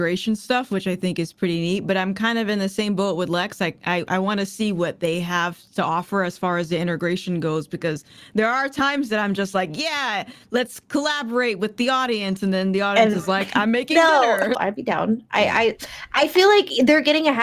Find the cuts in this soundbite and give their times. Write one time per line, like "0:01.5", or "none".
0:14.5